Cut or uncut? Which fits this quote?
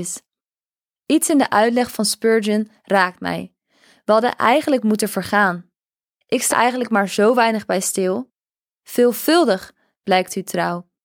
cut